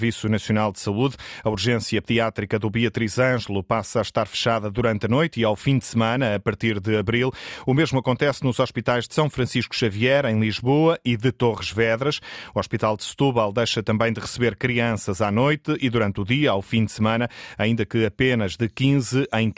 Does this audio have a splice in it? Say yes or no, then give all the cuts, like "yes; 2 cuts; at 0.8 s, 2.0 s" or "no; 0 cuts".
no; 0 cuts